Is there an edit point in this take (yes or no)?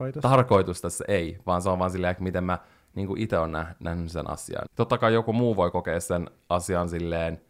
yes